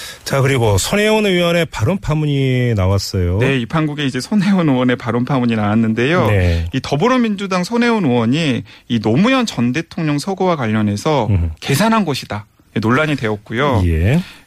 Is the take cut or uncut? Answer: cut